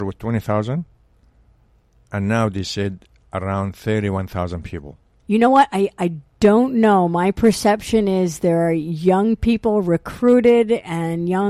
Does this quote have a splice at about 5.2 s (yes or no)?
yes